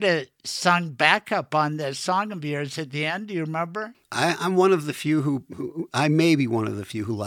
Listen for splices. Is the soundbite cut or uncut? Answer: cut